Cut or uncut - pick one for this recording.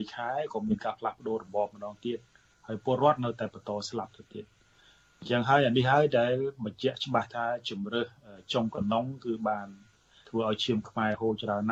uncut